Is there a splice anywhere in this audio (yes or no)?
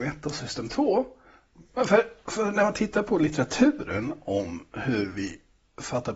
yes